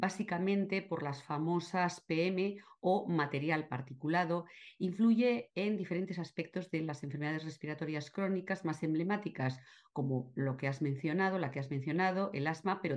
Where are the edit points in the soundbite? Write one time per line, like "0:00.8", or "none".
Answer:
none